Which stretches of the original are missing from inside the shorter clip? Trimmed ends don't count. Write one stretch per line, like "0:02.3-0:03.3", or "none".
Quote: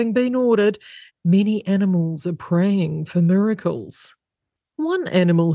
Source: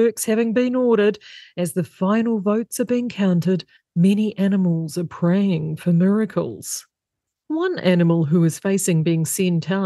0:01.5-0:03.8